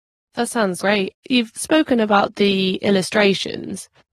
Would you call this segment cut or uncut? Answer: cut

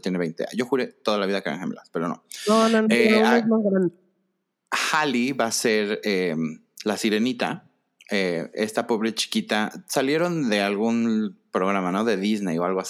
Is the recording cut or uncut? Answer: uncut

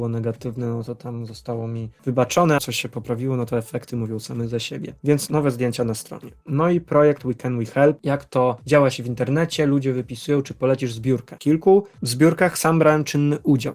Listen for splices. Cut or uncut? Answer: cut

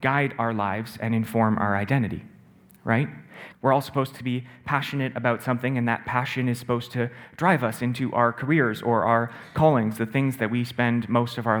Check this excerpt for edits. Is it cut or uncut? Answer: cut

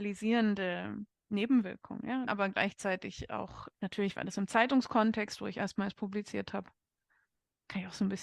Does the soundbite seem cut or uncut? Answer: cut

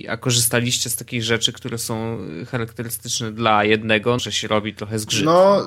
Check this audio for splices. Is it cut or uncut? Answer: cut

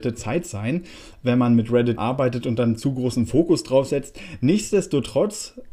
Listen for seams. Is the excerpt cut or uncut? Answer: cut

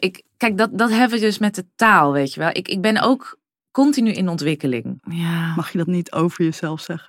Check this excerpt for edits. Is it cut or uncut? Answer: cut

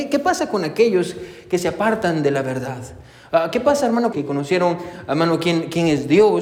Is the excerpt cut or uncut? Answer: cut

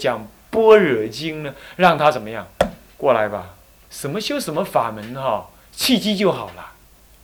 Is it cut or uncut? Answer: cut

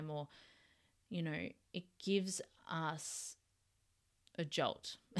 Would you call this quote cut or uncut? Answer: uncut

